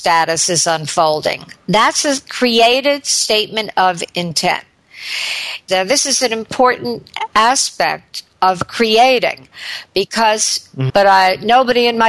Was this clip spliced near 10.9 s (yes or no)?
yes